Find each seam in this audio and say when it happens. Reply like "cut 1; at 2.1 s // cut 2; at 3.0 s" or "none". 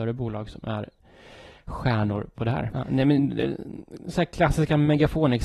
cut 1; at 2.7 s